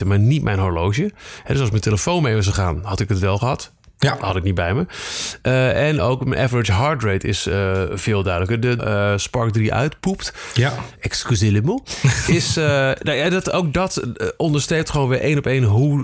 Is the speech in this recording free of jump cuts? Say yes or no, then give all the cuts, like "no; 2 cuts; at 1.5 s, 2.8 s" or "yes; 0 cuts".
no; 1 cut; at 8.8 s